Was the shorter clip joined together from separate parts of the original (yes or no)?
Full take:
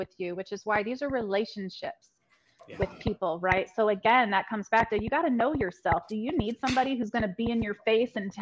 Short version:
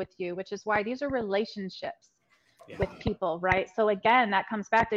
no